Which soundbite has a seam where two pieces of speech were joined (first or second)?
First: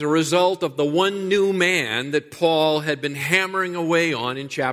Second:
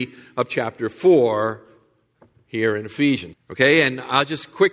second